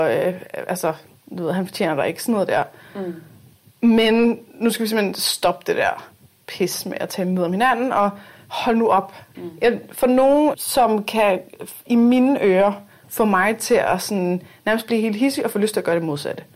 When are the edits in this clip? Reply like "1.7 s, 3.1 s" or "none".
9.3 s, 10.5 s